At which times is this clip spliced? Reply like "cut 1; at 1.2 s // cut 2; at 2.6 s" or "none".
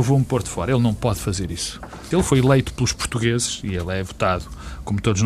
cut 1; at 2.1 s